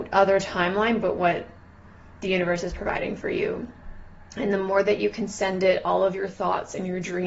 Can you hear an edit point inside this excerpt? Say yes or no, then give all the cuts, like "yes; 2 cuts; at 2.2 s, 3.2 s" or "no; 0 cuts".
no; 0 cuts